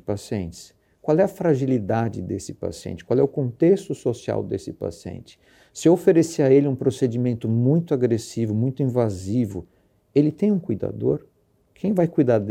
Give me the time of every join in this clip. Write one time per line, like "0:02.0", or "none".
none